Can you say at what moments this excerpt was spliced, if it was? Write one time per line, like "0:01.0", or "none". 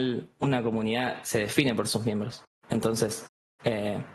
none